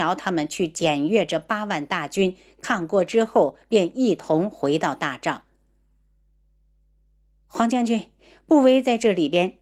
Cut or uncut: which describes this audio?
uncut